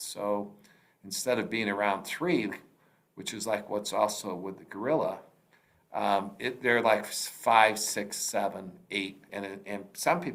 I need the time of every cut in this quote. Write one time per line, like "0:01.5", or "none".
0:09.3